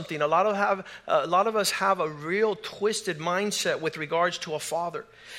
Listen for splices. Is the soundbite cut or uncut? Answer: uncut